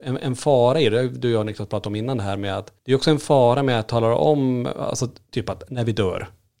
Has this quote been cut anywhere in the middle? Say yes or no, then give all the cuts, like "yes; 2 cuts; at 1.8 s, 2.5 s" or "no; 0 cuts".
no; 0 cuts